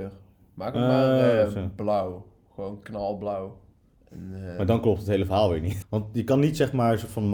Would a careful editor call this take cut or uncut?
cut